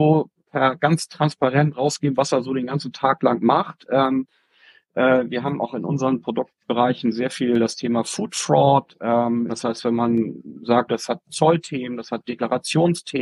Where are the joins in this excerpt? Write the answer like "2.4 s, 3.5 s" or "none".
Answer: 9.5 s, 10.9 s

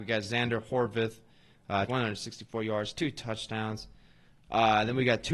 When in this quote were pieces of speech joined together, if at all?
1.9 s

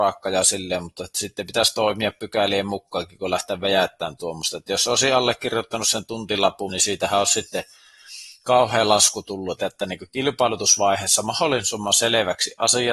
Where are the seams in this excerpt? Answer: 6.7 s, 9.6 s

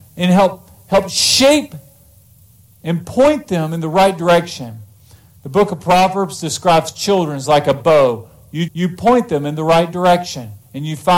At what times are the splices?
8.7 s

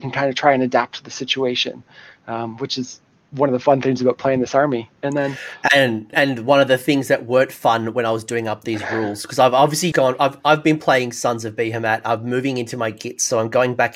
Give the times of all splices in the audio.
5.0 s, 6.1 s, 9.9 s

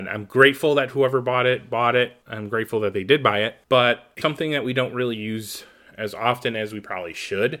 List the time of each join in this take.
2.2 s, 4.2 s

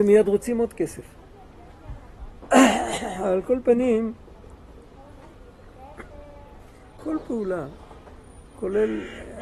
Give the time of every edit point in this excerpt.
2.4 s, 7.0 s

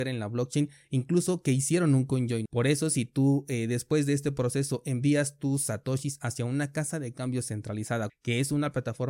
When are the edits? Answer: 2.5 s, 8.1 s

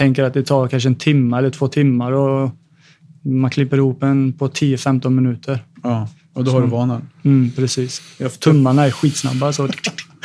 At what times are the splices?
none

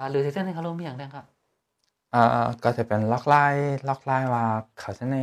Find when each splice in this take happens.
none

